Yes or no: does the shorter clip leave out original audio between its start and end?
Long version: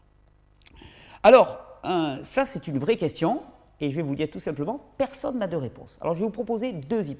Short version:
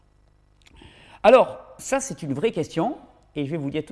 yes